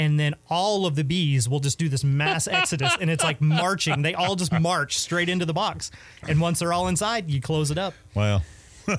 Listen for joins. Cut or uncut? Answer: uncut